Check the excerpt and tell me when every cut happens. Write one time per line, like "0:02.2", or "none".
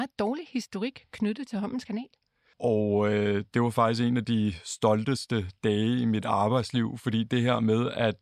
0:02.5